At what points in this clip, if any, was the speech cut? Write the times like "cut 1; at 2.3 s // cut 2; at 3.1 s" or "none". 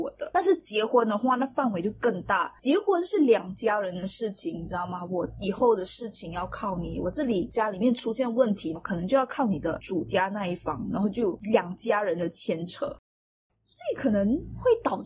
cut 1; at 8.8 s